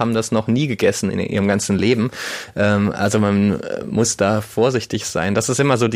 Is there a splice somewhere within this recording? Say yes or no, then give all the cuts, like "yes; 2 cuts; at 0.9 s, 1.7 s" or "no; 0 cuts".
no; 0 cuts